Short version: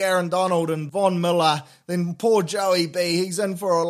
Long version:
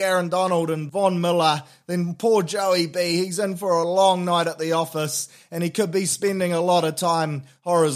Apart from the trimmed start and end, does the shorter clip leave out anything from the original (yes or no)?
no